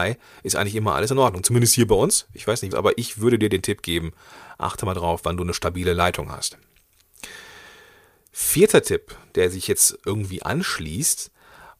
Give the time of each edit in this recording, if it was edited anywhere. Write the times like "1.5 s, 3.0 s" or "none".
2.7 s

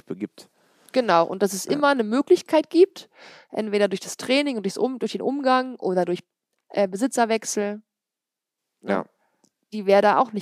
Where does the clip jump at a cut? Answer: none

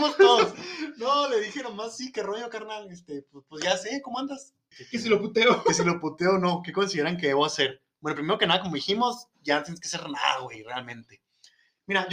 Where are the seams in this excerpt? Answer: 4.7 s

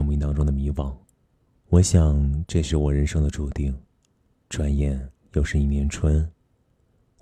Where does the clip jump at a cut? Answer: 4.4 s

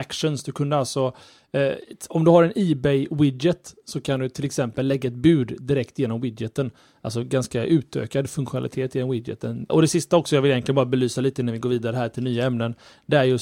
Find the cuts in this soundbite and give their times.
9.7 s

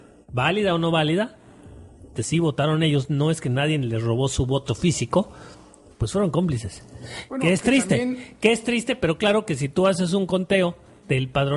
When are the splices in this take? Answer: 2.1 s

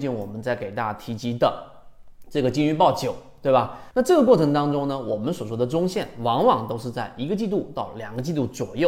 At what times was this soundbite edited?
3.9 s

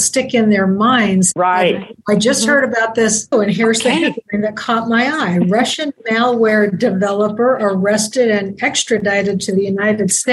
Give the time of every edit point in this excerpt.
1.3 s, 3.3 s

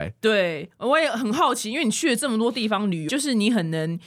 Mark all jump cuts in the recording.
3.1 s

